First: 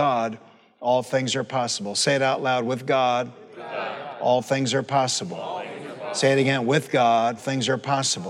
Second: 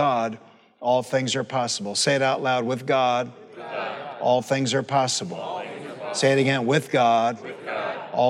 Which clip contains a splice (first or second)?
first